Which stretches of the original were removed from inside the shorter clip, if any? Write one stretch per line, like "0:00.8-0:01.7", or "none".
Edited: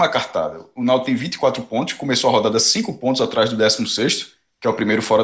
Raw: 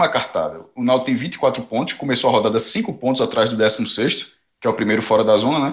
none